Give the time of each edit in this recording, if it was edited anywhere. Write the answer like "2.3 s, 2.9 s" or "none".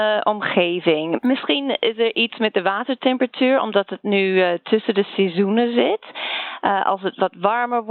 none